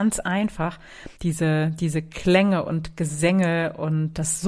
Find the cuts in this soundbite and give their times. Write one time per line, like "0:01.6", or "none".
0:01.2